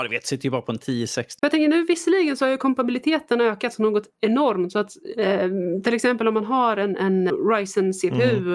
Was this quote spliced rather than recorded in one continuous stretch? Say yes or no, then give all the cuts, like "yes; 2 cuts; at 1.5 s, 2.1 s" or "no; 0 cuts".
yes; 2 cuts; at 1.4 s, 7.3 s